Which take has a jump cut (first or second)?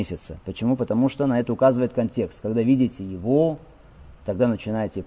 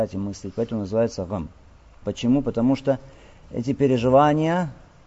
second